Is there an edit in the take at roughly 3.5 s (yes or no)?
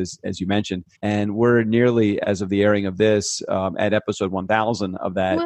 no